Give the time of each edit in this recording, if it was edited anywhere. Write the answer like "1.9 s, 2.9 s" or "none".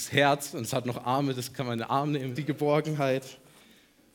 2.4 s